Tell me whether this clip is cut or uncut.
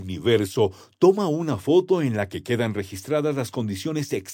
uncut